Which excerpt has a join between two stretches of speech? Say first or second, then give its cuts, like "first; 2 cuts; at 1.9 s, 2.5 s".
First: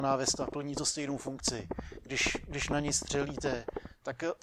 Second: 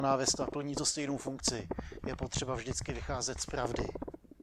second; 1 cut; at 2.0 s